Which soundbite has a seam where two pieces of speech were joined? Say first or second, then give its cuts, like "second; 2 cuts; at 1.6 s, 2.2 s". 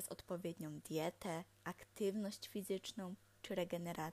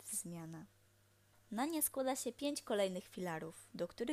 second; 1 cut; at 1.3 s